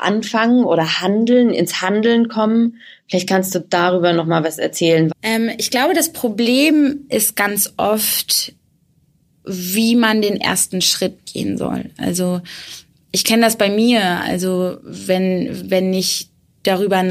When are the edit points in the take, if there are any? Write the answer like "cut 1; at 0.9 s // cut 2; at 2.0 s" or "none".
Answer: cut 1; at 5.1 s // cut 2; at 9.3 s